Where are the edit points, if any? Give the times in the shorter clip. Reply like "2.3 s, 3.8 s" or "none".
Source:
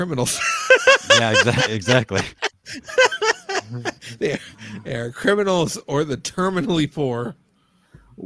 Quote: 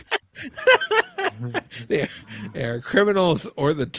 none